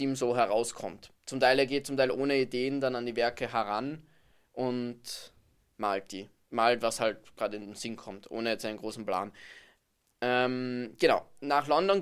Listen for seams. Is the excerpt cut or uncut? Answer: uncut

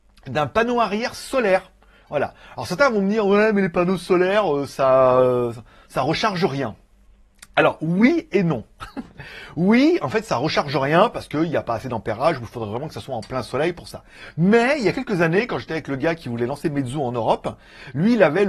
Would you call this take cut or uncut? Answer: uncut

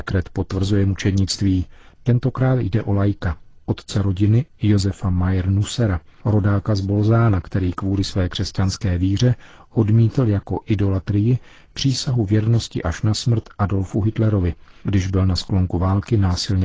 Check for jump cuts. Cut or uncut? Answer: uncut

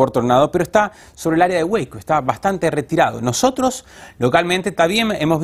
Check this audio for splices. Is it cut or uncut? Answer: uncut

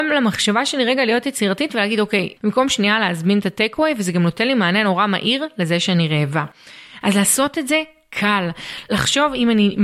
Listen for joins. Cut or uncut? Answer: cut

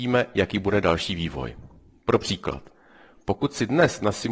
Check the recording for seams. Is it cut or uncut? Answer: uncut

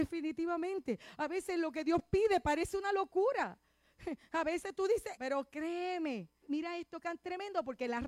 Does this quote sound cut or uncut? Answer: cut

